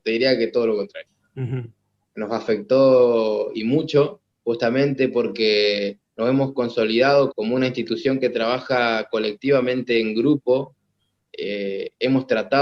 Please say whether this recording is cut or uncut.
cut